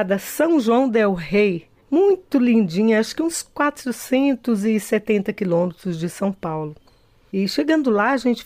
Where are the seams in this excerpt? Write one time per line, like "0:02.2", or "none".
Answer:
none